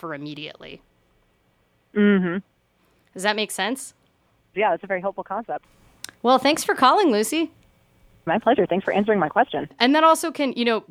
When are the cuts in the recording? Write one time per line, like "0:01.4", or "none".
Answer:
0:04.5
0:08.3
0:09.7